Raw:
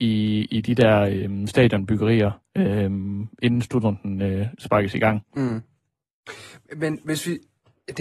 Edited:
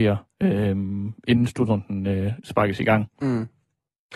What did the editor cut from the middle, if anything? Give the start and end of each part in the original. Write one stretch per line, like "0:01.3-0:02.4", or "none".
none